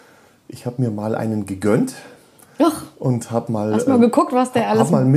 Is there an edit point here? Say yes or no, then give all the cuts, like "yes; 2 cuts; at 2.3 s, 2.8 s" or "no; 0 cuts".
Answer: no; 0 cuts